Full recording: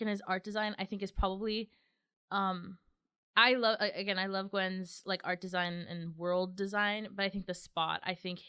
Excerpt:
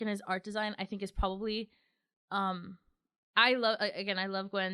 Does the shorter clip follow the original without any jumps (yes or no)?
yes